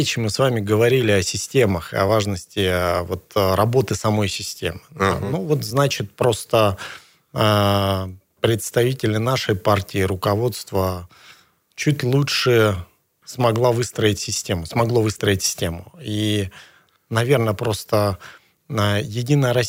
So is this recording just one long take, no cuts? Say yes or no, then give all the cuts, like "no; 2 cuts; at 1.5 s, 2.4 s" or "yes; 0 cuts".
yes; 0 cuts